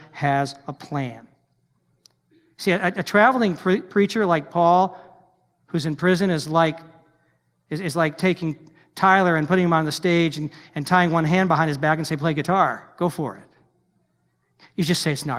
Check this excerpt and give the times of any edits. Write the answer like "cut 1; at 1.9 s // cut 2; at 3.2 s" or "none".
none

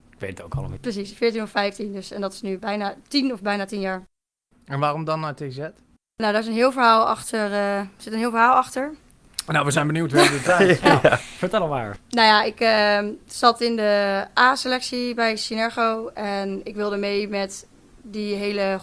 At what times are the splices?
cut 1; at 2.6 s

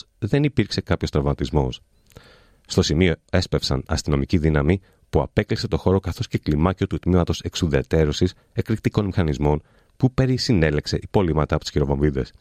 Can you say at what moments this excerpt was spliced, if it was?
none

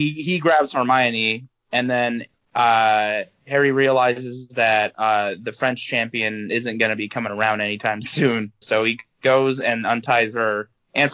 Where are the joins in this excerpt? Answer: cut 1; at 8.6 s

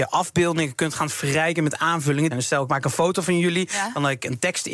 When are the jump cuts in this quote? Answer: cut 1; at 2.3 s

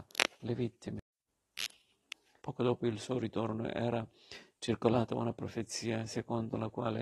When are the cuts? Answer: cut 1; at 2.4 s

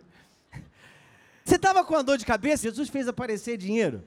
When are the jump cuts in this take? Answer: cut 1; at 1.5 s // cut 2; at 2.6 s

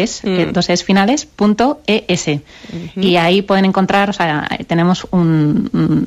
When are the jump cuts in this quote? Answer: none

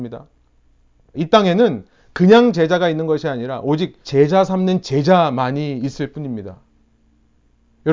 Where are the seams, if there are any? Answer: cut 1; at 1.1 s // cut 2; at 4.0 s

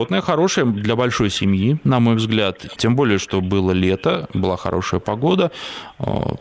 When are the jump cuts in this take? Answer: cut 1; at 2.8 s

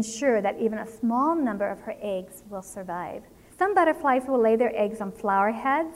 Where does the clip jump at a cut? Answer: cut 1; at 3.5 s

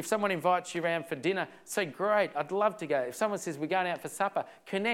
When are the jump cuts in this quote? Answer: none

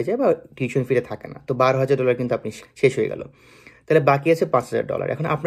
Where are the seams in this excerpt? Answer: cut 1; at 2.6 s

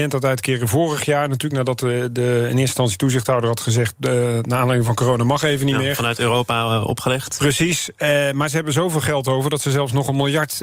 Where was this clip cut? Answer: none

